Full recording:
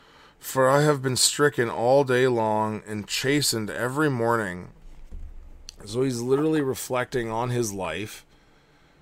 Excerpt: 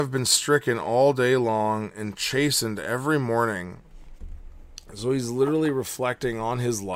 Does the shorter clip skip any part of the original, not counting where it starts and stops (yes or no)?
no